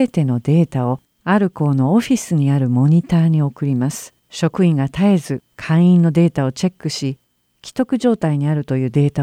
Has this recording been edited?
yes; 2 cuts; at 4.2 s, 5.5 s

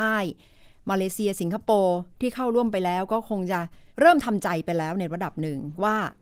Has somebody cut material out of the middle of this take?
yes; 1 cut; at 3.9 s

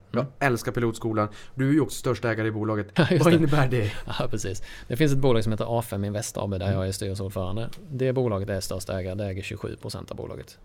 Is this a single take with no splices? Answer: no; 1 cut; at 3.0 s

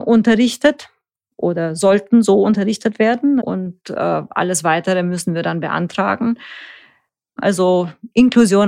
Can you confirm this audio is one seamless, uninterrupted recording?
no; 2 cuts; at 3.4 s, 7.4 s

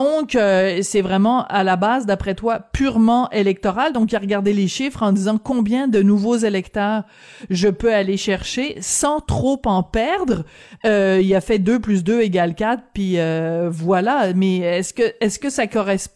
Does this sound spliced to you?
no; 0 cuts

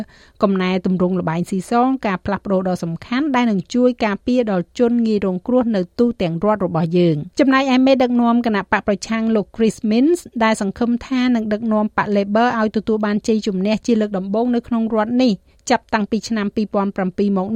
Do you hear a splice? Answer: yes; 1 cut; at 7.3 s

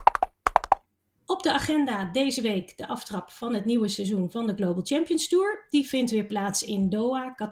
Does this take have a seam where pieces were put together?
no; 0 cuts

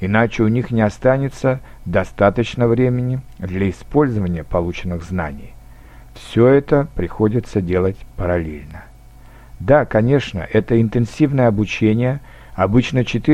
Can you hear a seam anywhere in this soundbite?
no; 0 cuts

